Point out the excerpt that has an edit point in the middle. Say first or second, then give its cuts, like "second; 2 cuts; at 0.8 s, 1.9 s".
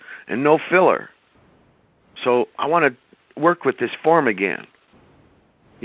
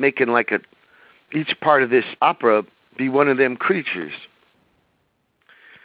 second; 1 cut; at 2.2 s